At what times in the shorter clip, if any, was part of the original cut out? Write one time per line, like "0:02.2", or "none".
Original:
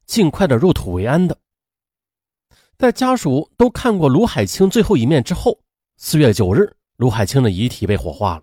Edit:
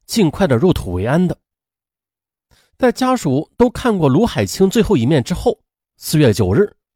none